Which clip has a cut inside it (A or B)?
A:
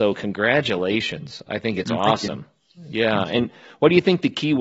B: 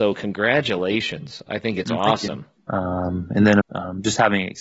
B